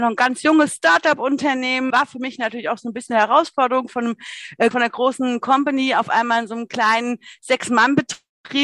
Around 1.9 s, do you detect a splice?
yes; 2 cuts; at 1.9 s, 4.7 s

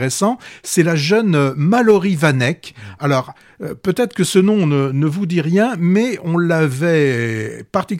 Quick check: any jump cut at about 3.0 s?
no; 0 cuts

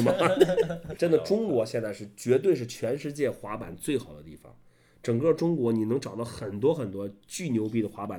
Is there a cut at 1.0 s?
yes; 1 cut; at 1.0 s

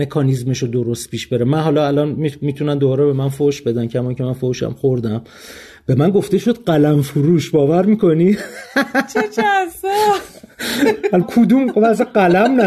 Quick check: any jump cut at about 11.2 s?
yes; 1 cut; at 11.2 s

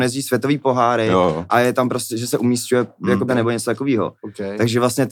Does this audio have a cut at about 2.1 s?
yes; 2 cuts; at 2.1 s, 3.3 s

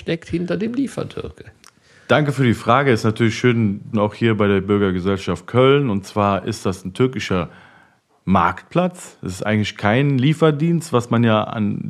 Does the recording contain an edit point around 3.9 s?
yes; 1 cut; at 3.9 s

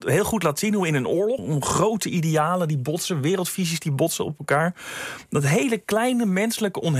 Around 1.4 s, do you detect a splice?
yes; 1 cut; at 1.4 s

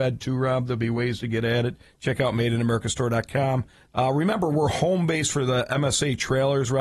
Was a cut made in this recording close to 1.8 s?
no; 1 cut; at 3.9 s

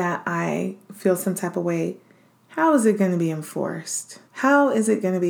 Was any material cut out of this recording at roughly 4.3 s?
yes; 1 cut; at 4.3 s

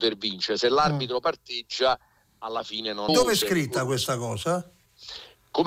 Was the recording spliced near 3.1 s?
yes; 1 cut; at 3.1 s

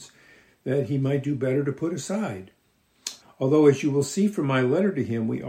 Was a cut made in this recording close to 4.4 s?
no; 1 cut; at 3.2 s

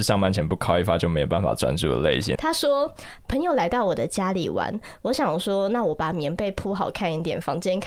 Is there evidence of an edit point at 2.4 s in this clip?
yes; 1 cut; at 2.4 s

